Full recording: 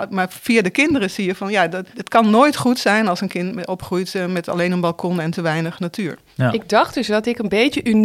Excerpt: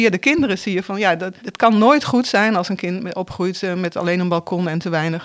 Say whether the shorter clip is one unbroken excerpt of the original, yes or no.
yes